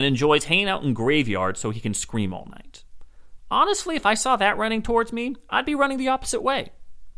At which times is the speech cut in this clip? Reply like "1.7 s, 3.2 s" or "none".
none